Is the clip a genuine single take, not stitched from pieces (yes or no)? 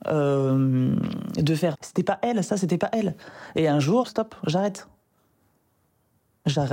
no